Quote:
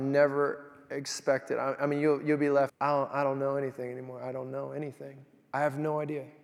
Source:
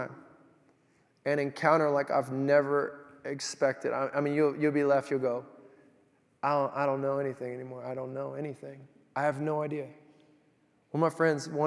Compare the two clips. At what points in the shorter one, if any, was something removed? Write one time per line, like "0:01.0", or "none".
0:02.7